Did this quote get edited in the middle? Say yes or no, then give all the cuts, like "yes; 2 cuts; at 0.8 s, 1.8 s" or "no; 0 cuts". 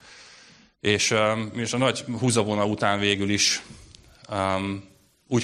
no; 0 cuts